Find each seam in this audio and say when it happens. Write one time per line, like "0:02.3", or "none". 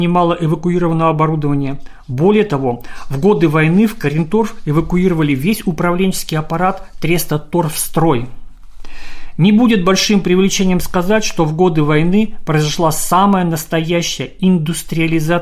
none